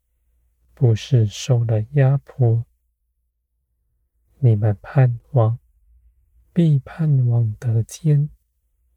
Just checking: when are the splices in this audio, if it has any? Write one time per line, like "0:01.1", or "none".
0:04.3

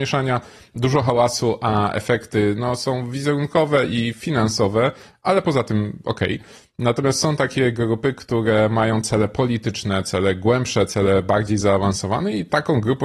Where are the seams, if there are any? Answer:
none

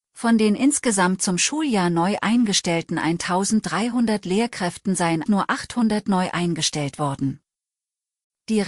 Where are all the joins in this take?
0:05.3

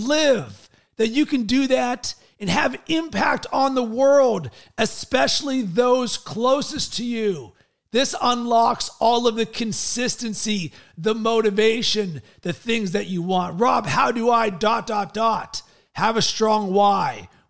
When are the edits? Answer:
none

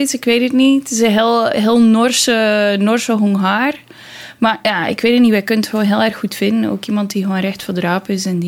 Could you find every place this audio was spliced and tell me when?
none

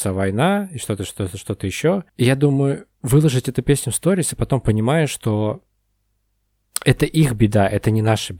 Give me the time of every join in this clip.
0:02.1

